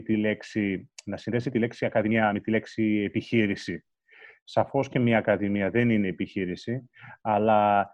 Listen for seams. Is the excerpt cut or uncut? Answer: uncut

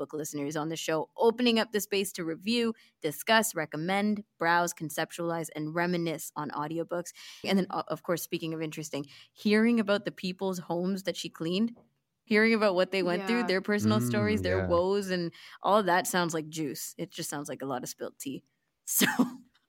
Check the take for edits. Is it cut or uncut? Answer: cut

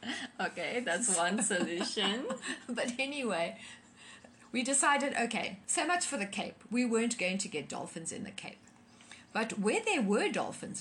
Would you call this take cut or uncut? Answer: uncut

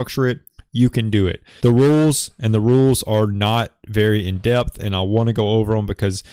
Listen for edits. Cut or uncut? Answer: cut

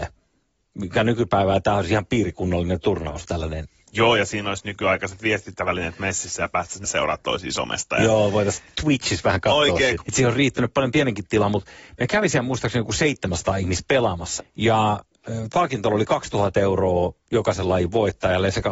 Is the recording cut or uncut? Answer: cut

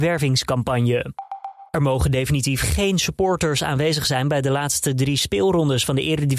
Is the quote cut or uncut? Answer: cut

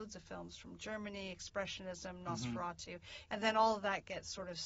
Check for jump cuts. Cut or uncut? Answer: cut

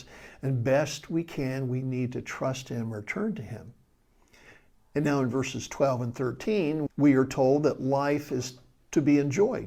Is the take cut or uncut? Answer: cut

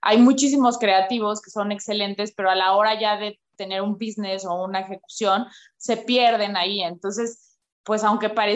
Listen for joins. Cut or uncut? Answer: uncut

